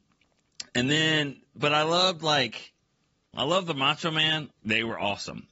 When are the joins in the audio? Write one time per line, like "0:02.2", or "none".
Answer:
0:03.3
0:04.5